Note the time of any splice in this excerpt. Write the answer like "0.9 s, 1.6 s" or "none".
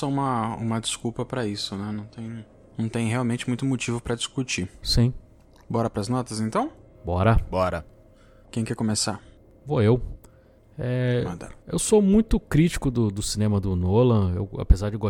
none